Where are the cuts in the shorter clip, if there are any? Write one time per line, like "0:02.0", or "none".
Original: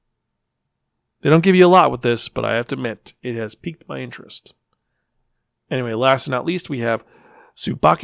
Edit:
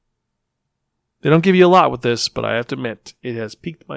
none